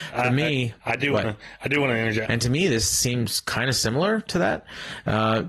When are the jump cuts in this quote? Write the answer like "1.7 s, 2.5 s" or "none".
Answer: 2.3 s

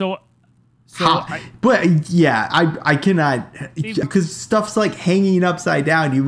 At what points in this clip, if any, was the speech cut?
4.0 s

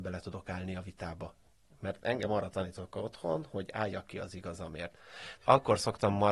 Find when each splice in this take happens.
5.4 s

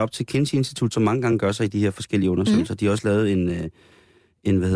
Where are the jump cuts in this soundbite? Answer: 0.9 s

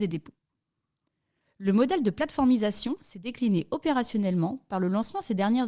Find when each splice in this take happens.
none

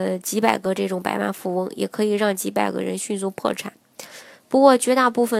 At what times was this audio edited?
4.3 s

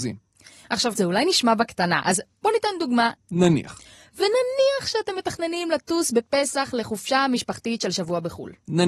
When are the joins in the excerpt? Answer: 1.0 s, 3.2 s

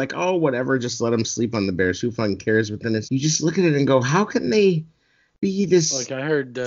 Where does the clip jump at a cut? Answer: 3.0 s

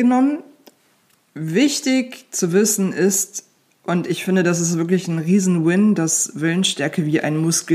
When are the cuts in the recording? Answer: none

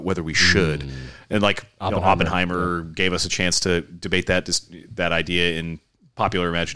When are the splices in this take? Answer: none

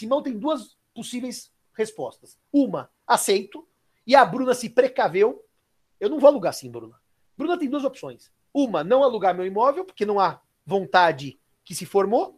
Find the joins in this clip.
5.9 s

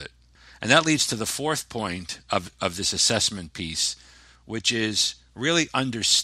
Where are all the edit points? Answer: none

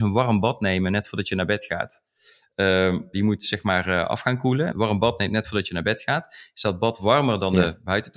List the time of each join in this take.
3.1 s, 4.7 s

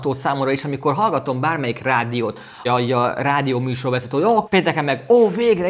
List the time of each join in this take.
2.7 s, 4.5 s

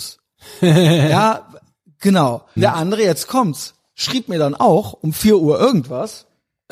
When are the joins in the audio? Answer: 2.6 s

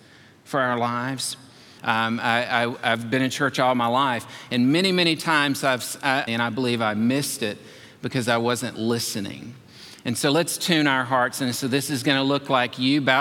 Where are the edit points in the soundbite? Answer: 1.8 s, 6.3 s

